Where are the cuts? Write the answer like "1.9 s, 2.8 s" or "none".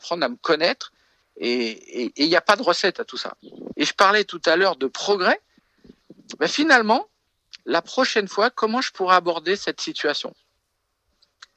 3.7 s